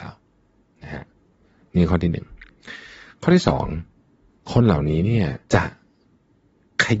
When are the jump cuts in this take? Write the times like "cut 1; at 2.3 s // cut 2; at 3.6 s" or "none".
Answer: cut 1; at 5.4 s